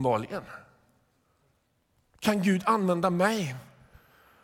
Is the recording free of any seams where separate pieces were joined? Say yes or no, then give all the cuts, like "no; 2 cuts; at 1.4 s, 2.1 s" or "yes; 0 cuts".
yes; 0 cuts